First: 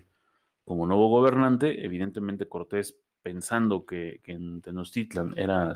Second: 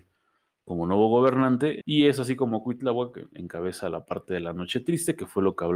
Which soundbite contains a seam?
second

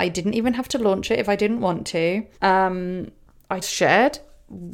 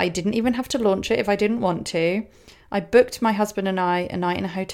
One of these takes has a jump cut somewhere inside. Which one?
first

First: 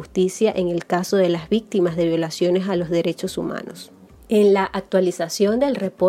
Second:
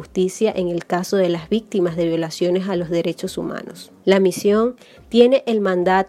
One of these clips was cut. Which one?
second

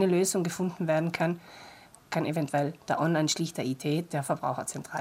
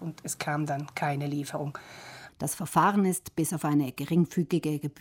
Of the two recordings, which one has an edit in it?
second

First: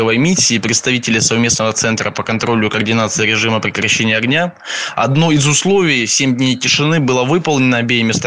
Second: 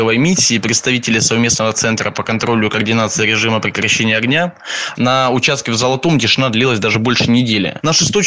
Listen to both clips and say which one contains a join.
second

